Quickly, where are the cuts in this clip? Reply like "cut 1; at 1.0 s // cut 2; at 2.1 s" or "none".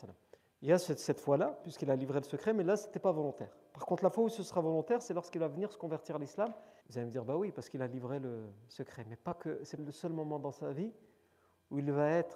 cut 1; at 6.8 s // cut 2; at 9.8 s